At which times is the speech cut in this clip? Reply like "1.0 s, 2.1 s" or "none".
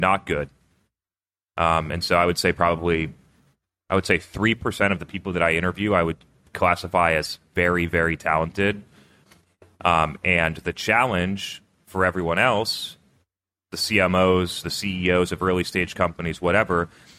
none